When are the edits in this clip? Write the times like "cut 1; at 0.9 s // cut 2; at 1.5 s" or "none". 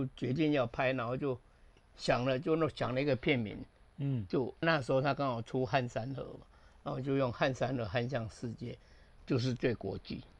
cut 1; at 4.6 s // cut 2; at 9.2 s